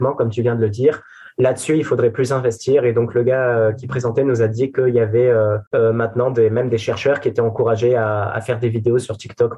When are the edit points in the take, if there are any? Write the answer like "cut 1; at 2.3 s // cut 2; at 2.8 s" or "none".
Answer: cut 1; at 5.7 s